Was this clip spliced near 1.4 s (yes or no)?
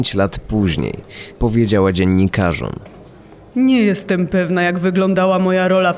yes